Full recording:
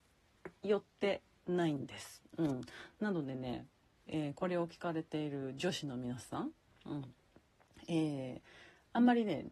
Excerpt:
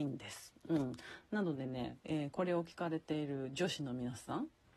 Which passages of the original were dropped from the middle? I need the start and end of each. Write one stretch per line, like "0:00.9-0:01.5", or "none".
0:03.7-0:04.0